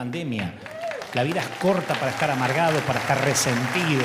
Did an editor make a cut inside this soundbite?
no; 0 cuts

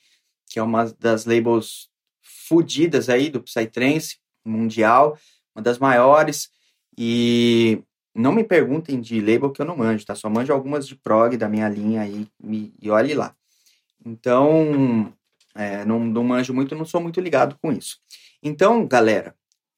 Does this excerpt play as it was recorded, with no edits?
yes; 0 cuts

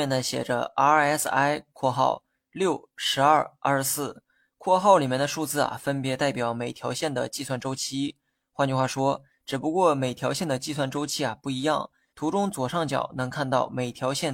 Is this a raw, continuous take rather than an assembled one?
no; 2 cuts; at 9.3 s, 12.1 s

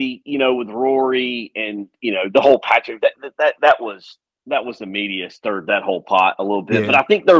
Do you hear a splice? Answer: no; 0 cuts

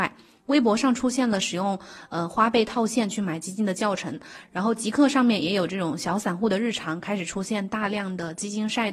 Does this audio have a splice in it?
no; 0 cuts

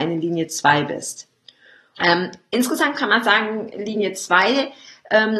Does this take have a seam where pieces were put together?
yes; 1 cut; at 2.0 s

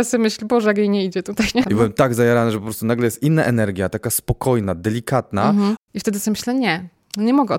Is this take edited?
yes; 2 cuts; at 1.6 s, 5.8 s

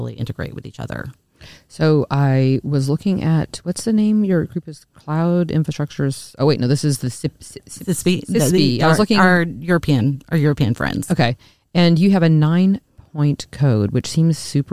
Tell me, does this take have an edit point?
no; 0 cuts

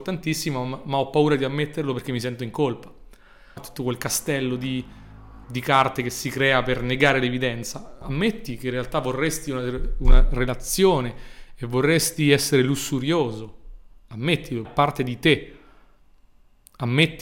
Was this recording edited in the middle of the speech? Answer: yes; 3 cuts; at 3.6 s, 5.4 s, 14.6 s

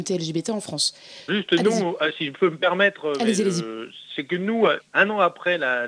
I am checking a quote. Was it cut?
yes; 2 cuts; at 1.3 s, 4.8 s

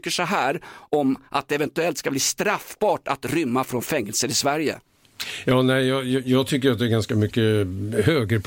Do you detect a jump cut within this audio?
no; 0 cuts

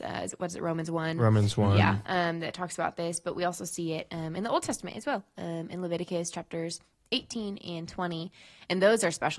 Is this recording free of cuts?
yes; 0 cuts

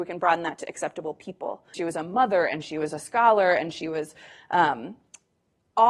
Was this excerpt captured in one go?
no; 1 cut; at 1.7 s

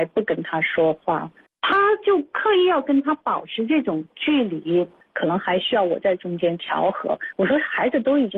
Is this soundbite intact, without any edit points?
no; 3 cuts; at 1.5 s, 5.0 s, 7.3 s

